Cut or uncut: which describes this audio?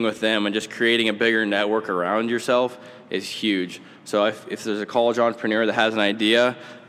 uncut